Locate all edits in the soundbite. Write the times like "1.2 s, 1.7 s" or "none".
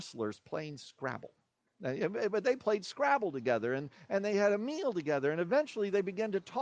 none